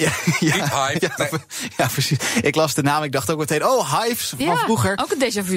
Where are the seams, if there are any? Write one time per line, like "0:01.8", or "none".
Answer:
0:01.0